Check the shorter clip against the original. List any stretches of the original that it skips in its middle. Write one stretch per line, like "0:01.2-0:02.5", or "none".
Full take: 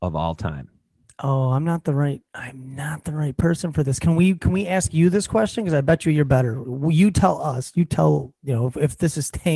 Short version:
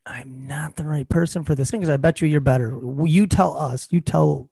0:04.0-0:05.6